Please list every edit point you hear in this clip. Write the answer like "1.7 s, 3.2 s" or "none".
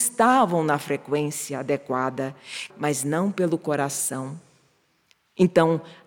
2.7 s